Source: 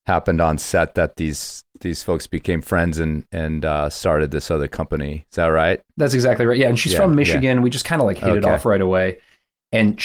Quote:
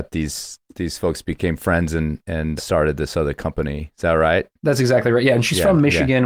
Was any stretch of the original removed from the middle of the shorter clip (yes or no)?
yes